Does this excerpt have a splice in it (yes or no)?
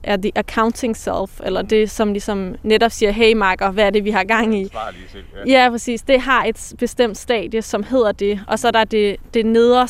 no